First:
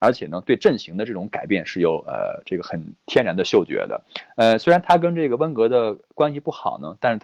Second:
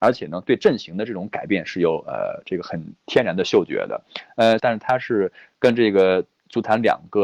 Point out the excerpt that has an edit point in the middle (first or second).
second